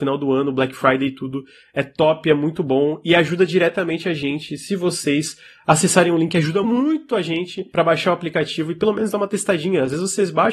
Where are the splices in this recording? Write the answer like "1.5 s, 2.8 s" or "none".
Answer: 6.6 s